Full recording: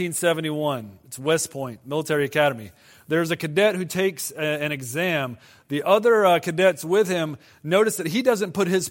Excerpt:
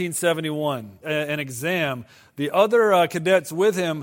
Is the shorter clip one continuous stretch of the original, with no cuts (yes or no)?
no